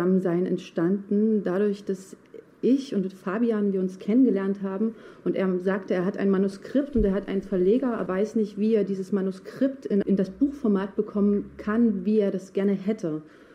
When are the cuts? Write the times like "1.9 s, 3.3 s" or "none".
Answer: 8.1 s, 10.0 s